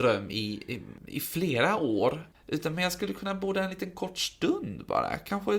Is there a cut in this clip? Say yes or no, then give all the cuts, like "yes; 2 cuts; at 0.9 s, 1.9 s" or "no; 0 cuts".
yes; 1 cut; at 2.3 s